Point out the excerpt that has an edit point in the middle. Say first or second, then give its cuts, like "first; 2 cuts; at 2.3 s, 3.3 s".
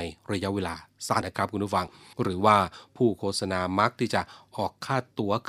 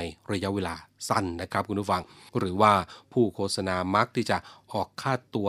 first; 1 cut; at 1.2 s